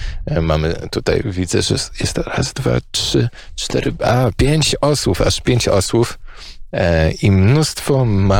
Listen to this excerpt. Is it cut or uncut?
uncut